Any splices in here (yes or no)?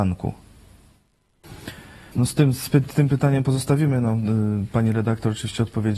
yes